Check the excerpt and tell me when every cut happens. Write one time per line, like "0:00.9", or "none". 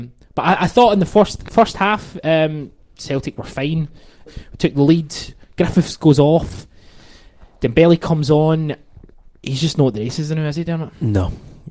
0:04.3